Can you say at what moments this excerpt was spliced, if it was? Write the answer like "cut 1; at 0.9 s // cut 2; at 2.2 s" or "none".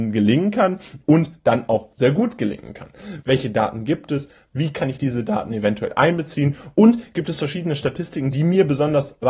cut 1; at 3.2 s

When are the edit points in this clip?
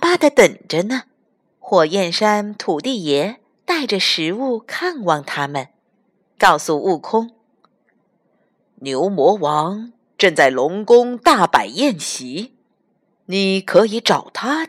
cut 1; at 1.5 s

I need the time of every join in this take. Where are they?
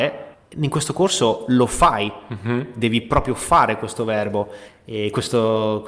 none

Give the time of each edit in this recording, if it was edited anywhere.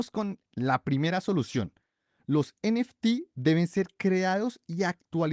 none

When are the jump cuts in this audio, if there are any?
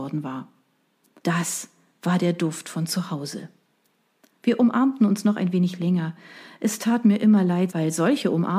cut 1; at 1.2 s // cut 2; at 7.7 s

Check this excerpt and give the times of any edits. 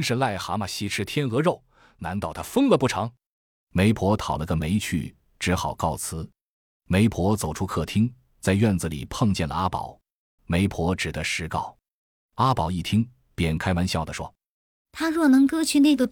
cut 1; at 10.4 s

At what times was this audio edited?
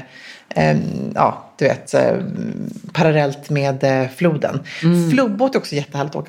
none

